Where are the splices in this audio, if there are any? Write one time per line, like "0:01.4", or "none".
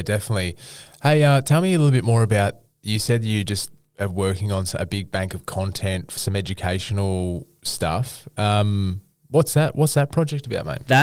none

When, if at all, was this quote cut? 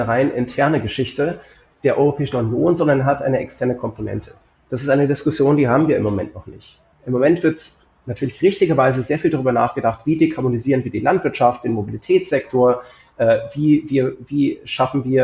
none

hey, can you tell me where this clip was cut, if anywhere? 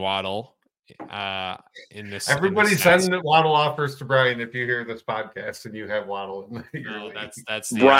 none

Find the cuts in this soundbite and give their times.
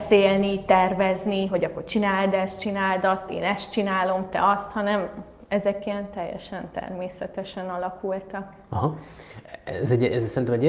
none

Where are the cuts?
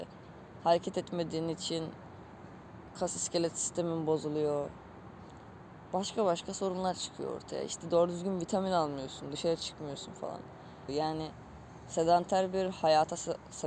0:10.9

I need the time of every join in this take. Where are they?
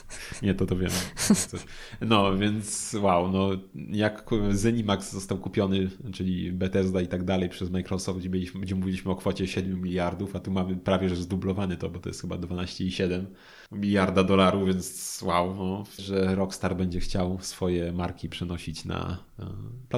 0:13.7
0:16.0

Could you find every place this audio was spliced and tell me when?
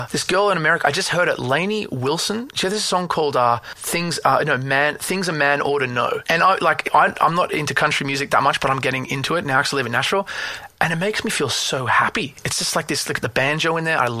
none

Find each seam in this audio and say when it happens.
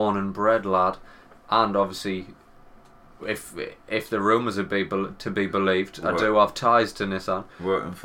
none

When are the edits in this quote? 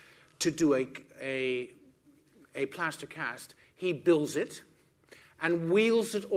0:05.2

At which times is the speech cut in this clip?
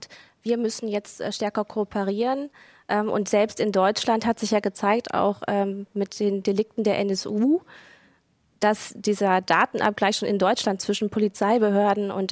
none

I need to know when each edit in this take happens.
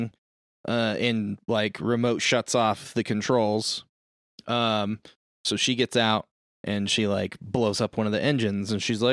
none

